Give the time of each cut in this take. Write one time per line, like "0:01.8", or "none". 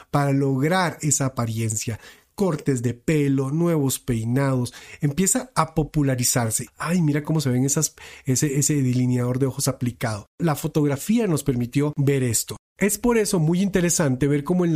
0:06.7